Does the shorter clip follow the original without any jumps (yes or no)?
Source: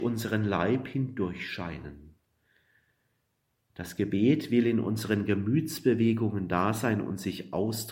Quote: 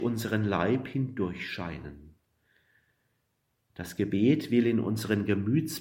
yes